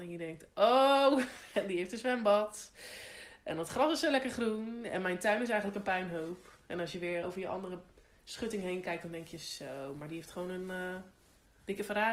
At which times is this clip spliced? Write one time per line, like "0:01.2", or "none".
0:07.2